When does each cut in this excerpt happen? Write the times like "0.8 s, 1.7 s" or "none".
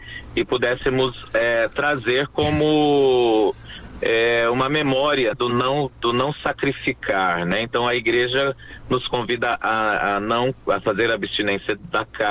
5.3 s